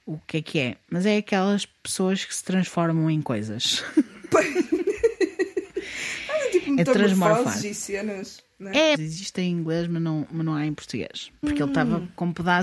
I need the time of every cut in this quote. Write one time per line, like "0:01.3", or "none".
0:08.9
0:11.4